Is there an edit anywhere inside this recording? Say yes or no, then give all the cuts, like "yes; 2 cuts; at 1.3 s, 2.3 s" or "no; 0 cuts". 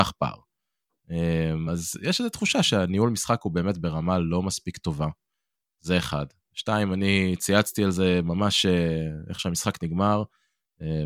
no; 0 cuts